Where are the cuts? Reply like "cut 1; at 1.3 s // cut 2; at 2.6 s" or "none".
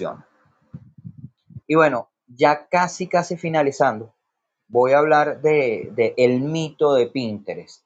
cut 1; at 1.6 s

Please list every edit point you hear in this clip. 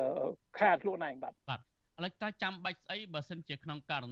cut 1; at 1.4 s

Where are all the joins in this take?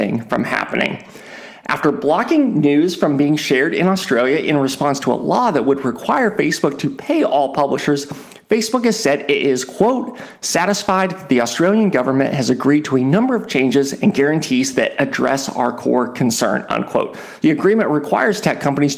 cut 1; at 17.4 s

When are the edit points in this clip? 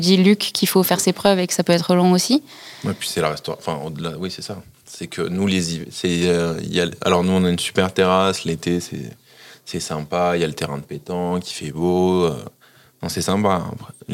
none

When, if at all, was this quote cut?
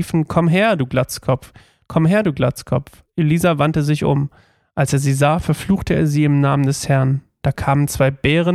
none

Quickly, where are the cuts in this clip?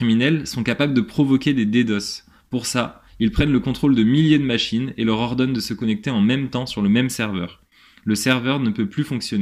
none

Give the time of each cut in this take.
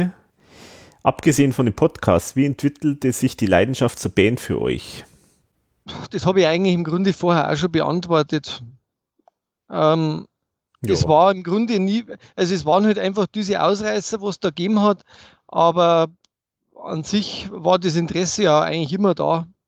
none

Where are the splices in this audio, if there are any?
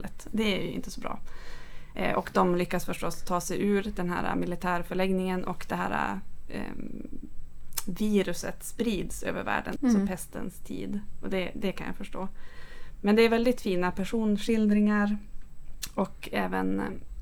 cut 1; at 9.8 s

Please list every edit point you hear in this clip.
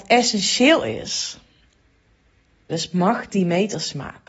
cut 1; at 2.7 s

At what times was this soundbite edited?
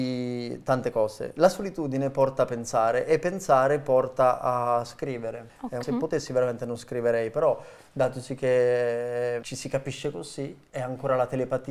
cut 1; at 5.8 s

